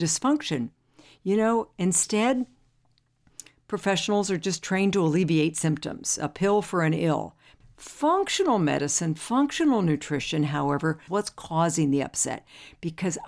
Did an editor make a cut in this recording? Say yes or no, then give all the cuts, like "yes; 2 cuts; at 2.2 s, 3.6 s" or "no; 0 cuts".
yes; 2 cuts; at 7.6 s, 11.1 s